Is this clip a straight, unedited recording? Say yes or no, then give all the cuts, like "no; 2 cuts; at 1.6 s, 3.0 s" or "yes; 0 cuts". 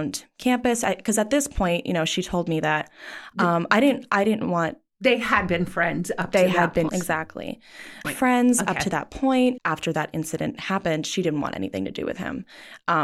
no; 3 cuts; at 6.9 s, 8.0 s, 9.6 s